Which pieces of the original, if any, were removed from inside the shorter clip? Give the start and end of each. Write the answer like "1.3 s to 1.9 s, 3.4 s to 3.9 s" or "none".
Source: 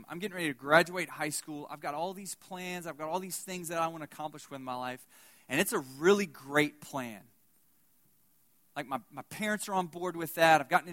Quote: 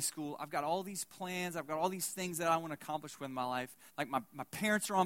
5.2 s to 8.7 s